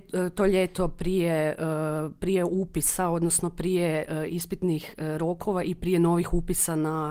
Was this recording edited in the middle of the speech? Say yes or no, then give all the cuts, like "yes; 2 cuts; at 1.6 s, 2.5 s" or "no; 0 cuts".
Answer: no; 0 cuts